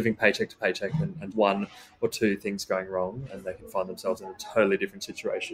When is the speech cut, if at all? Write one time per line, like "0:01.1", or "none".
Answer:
0:01.3
0:03.3